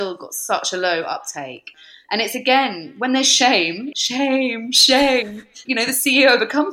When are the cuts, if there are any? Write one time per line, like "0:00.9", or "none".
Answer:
0:03.9
0:05.6

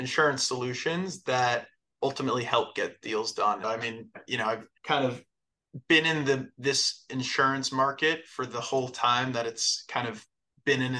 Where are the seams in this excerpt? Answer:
0:03.6
0:04.8

